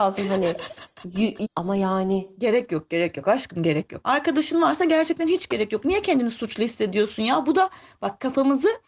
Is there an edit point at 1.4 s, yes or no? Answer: yes